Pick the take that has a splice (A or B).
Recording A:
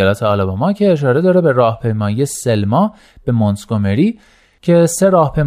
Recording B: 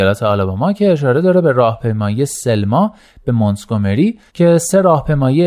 B